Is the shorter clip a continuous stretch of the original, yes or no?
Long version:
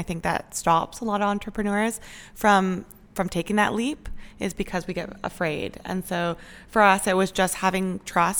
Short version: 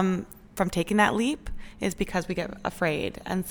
yes